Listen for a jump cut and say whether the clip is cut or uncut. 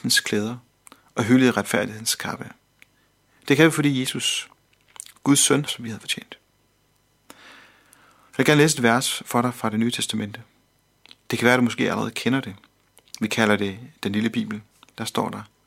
cut